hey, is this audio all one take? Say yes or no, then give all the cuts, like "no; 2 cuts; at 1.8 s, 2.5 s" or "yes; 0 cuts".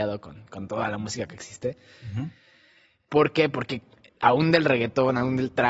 yes; 0 cuts